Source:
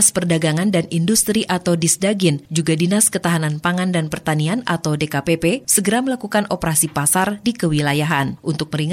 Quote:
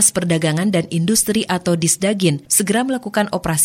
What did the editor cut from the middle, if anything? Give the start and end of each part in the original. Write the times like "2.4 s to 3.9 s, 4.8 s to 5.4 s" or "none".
2.5 s to 5.6 s